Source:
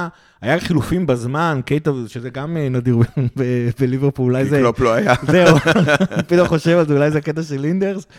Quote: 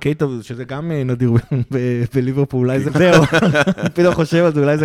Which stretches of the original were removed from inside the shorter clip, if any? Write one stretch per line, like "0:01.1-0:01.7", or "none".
0:04.5-0:05.2